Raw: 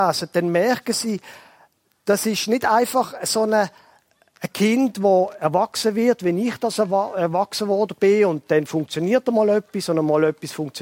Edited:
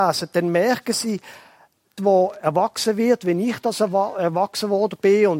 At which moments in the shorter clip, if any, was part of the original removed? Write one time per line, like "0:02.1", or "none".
0:02.0